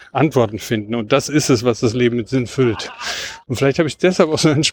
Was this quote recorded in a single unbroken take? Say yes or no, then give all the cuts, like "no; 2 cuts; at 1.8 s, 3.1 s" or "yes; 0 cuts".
no; 1 cut; at 3.4 s